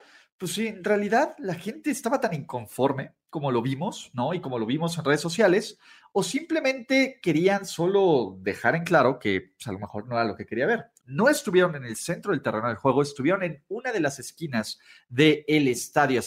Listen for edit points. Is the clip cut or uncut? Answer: cut